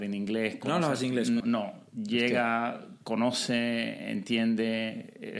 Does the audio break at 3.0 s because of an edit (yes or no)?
no